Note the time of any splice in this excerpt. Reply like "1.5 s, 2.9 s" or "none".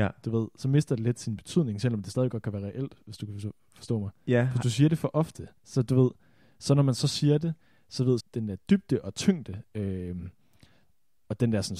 5.6 s, 8.2 s